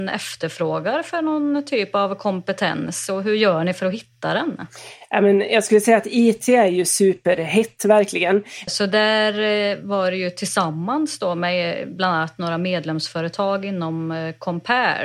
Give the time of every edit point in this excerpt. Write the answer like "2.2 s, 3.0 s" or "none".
8.7 s